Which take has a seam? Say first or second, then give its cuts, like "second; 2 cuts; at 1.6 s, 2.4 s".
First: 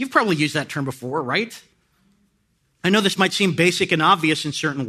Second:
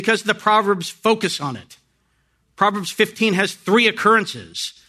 first; 1 cut; at 2.8 s